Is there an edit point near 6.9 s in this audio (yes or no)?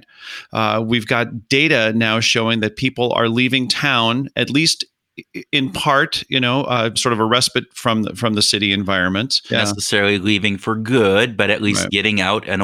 yes